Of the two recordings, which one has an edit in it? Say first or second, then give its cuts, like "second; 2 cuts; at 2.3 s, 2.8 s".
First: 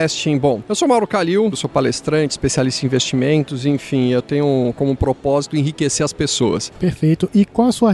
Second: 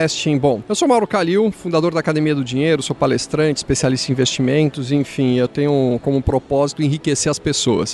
first; 2 cuts; at 1.5 s, 6.7 s